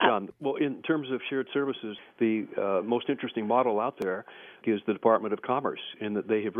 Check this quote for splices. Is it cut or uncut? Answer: cut